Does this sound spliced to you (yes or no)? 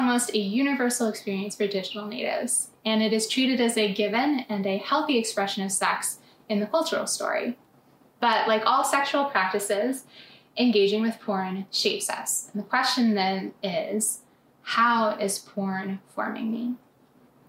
no